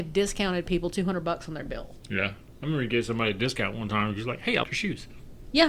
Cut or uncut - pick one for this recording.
cut